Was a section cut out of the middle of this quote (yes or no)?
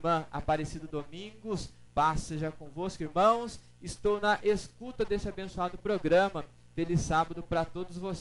no